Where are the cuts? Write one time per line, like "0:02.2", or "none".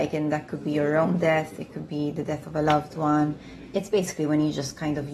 none